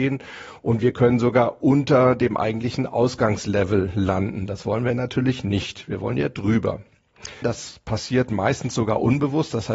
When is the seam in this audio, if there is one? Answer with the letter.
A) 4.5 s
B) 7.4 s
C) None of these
B